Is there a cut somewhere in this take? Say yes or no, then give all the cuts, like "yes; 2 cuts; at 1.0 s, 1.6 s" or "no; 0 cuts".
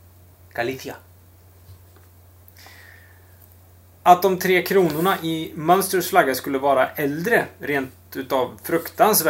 no; 0 cuts